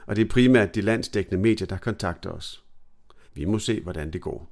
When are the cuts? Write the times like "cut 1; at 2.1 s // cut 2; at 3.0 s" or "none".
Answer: cut 1; at 3.3 s